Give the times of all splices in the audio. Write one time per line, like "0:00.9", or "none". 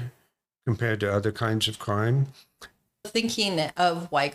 0:02.9